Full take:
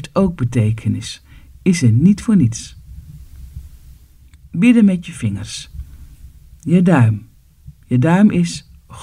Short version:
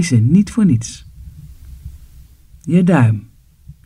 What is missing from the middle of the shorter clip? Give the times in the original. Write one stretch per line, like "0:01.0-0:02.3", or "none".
0:04.2-0:06.5